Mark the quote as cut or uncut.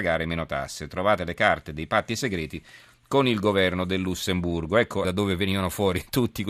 cut